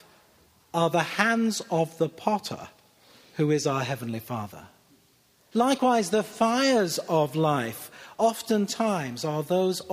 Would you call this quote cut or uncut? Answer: cut